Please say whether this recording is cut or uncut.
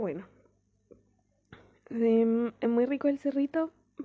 uncut